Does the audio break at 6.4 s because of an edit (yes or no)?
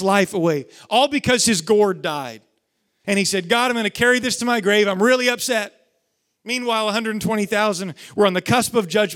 no